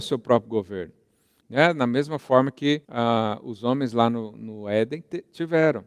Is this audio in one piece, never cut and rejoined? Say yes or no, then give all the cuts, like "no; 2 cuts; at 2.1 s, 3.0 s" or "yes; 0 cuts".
no; 2 cuts; at 1.4 s, 2.8 s